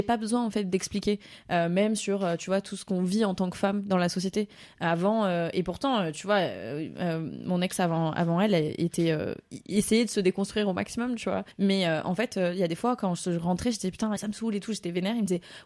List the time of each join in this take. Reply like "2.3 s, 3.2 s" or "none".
11.5 s, 14.2 s